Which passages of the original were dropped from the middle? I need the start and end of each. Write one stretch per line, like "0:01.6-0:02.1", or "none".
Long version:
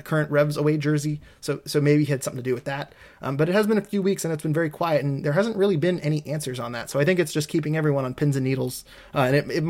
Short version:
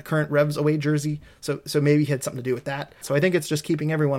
0:03.0-0:06.9